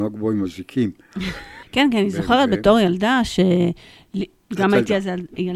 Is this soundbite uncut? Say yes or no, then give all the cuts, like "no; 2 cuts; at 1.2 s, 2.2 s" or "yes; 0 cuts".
no; 2 cuts; at 1.6 s, 4.3 s